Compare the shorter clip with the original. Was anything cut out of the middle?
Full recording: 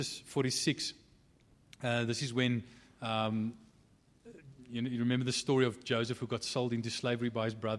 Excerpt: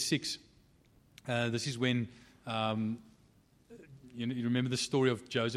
no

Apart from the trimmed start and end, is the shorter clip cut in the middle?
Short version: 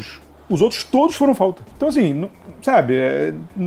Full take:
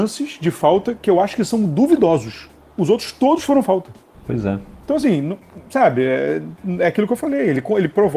yes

